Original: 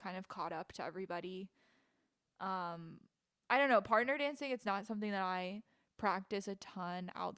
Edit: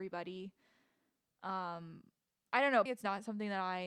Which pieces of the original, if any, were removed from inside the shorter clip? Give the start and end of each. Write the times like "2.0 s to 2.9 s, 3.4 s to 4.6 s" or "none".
3.8 s to 4.5 s